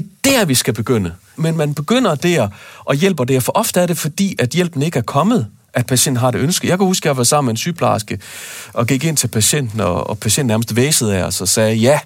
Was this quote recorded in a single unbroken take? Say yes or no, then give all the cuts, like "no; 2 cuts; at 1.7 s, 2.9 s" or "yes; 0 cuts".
no; 1 cut; at 1.3 s